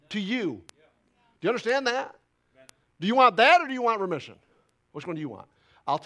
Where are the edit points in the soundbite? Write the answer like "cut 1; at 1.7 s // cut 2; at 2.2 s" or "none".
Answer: none